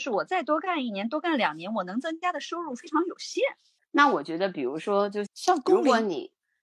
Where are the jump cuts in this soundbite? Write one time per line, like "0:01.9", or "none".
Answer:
0:03.8
0:05.3